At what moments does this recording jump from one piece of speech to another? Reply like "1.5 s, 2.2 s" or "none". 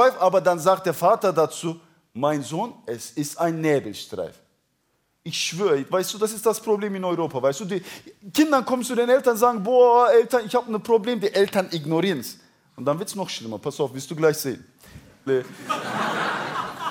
15.3 s